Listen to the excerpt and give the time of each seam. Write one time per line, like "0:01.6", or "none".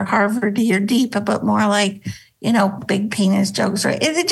0:02.8